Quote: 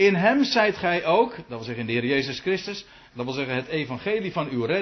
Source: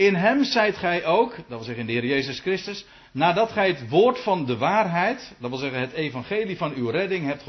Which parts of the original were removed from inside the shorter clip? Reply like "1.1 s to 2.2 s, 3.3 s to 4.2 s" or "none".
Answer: 3.1 s to 5.4 s